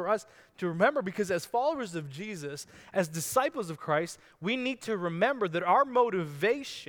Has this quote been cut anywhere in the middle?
no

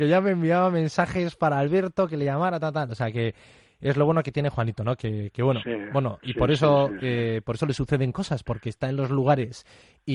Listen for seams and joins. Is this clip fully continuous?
yes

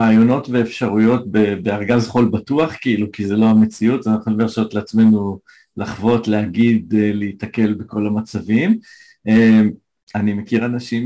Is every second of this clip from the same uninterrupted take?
yes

